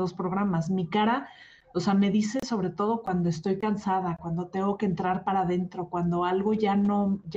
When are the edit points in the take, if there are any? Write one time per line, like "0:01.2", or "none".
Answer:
none